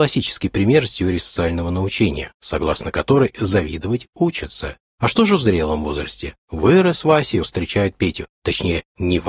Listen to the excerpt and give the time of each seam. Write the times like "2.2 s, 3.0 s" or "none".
4.9 s, 7.4 s